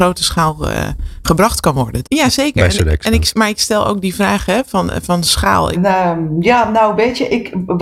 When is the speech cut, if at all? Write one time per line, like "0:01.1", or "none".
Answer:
0:02.0
0:05.7